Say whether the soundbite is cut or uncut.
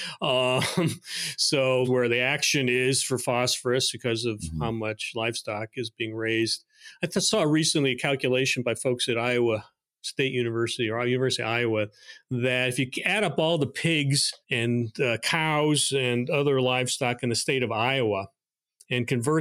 cut